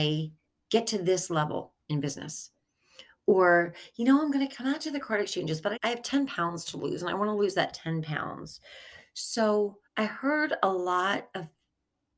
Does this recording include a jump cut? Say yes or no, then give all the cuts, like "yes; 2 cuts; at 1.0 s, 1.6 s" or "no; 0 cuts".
yes; 2 cuts; at 5.8 s, 9.9 s